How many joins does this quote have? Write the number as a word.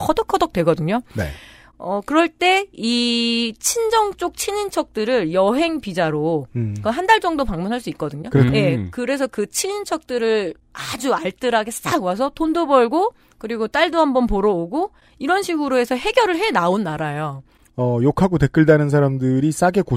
two